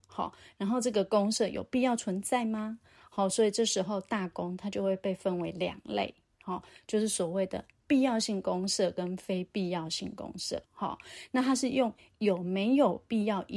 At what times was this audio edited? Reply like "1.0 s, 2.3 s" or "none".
10.6 s